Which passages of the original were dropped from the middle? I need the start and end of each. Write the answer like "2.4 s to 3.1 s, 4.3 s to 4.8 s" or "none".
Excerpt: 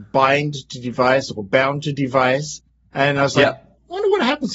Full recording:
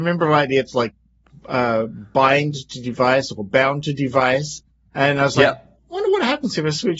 none